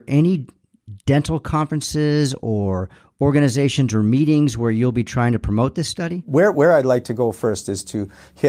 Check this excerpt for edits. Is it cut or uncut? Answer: uncut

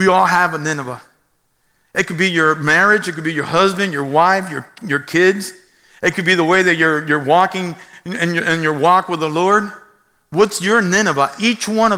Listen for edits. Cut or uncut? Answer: uncut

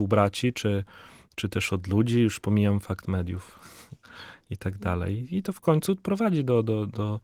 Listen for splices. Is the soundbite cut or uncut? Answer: uncut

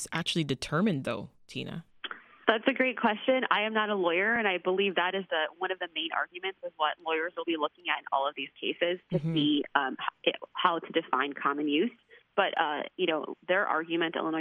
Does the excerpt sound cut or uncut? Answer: uncut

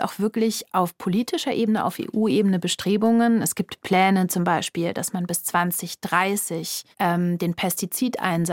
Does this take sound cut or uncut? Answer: cut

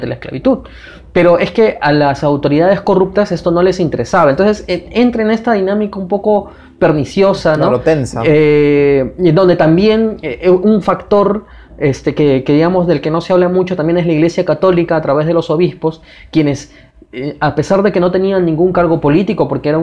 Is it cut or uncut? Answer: uncut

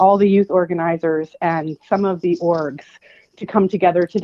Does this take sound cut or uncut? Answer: uncut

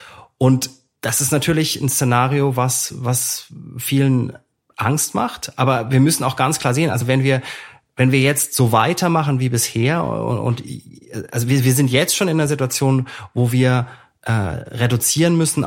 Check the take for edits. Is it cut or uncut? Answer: uncut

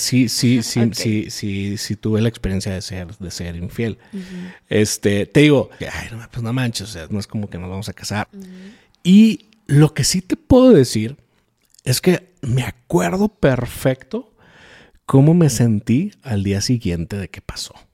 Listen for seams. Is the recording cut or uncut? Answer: cut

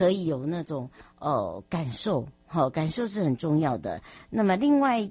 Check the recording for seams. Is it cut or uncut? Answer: uncut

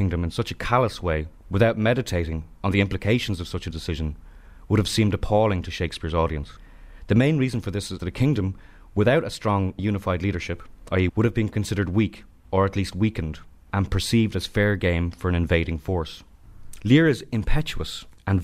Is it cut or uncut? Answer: cut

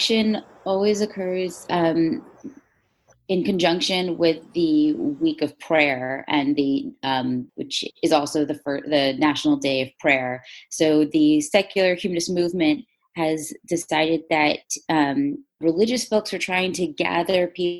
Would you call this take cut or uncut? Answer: cut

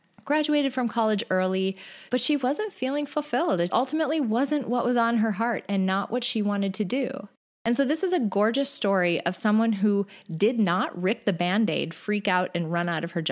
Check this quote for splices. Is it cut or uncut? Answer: cut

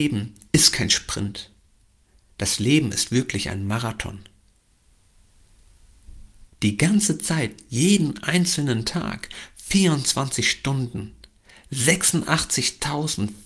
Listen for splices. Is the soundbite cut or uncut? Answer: cut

